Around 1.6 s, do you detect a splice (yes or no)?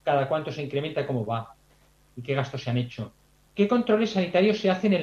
no